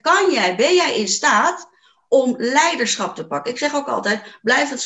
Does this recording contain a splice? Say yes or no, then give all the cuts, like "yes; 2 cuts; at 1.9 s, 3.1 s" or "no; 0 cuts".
no; 0 cuts